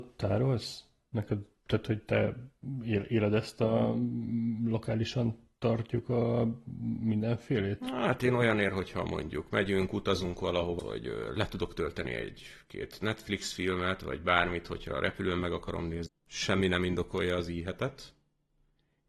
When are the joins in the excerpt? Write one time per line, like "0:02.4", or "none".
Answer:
0:10.8
0:16.1

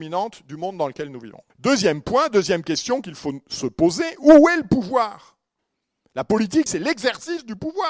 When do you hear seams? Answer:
0:01.5
0:06.7

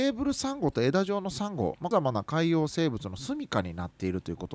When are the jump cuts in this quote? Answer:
0:01.9

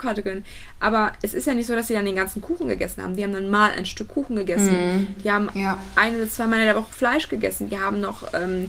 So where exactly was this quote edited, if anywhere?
none

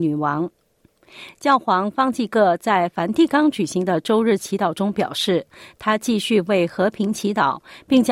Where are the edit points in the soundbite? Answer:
none

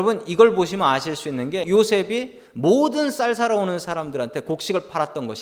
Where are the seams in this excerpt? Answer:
0:01.6

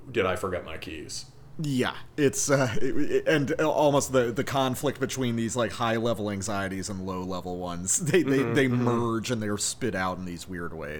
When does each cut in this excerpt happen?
none

